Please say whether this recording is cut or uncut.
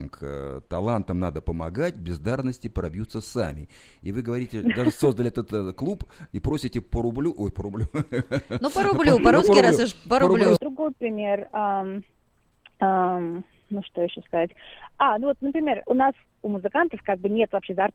cut